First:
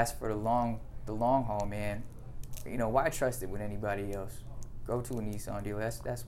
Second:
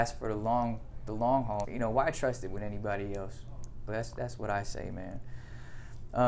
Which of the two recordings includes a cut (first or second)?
second